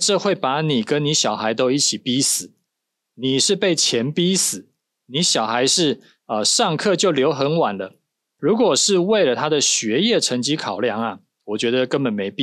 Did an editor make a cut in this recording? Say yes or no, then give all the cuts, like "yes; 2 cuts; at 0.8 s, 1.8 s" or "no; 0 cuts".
yes; 1 cut; at 8.4 s